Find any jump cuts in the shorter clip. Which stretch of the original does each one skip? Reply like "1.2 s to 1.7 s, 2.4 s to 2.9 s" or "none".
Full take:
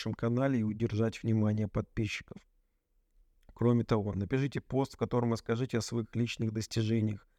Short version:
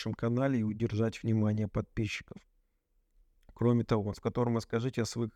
4.1 s to 4.9 s